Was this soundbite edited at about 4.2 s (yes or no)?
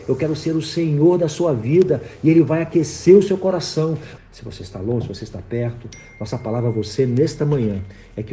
yes